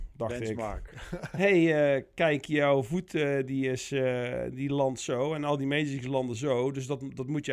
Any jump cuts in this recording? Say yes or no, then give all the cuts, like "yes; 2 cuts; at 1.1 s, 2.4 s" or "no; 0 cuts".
no; 0 cuts